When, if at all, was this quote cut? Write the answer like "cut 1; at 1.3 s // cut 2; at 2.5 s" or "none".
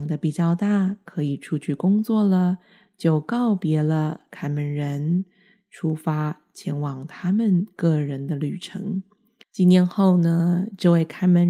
cut 1; at 9.4 s